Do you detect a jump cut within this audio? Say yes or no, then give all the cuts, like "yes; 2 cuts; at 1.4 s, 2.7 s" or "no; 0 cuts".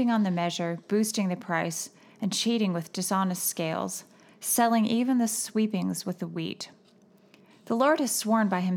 yes; 1 cut; at 4.3 s